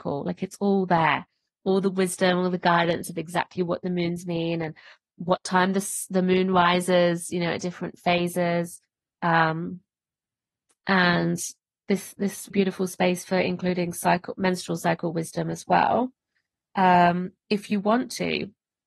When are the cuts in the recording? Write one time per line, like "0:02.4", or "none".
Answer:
0:12.5